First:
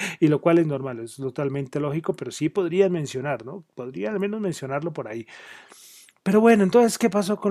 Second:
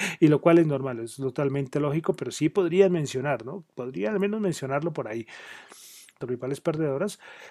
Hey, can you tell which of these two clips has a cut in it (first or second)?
second